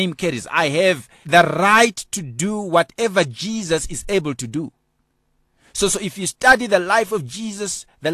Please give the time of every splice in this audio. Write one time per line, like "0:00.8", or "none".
0:01.2